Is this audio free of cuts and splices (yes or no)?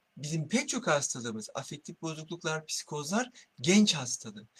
yes